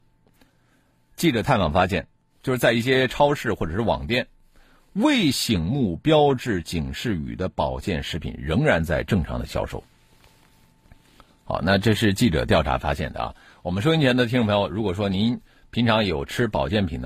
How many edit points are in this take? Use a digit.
0